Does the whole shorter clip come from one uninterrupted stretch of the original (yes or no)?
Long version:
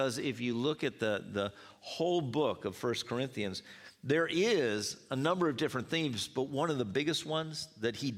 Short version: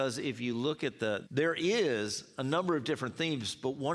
no